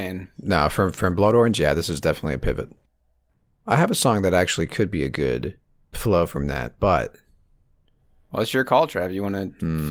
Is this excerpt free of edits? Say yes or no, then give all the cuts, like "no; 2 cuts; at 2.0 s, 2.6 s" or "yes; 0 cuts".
no; 1 cut; at 5.9 s